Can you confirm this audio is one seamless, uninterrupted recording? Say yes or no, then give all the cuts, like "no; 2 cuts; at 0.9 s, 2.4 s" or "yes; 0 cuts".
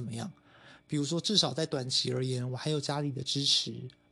yes; 0 cuts